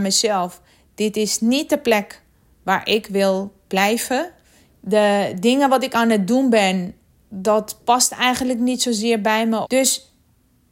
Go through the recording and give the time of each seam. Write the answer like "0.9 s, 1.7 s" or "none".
4.7 s, 9.6 s